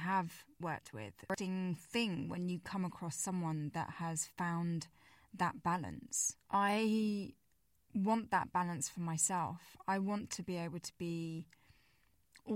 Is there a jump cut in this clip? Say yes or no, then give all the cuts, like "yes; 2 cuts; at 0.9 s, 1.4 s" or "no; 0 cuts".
yes; 1 cut; at 6.4 s